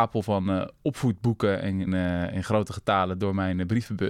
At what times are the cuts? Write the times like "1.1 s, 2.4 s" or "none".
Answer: 1.9 s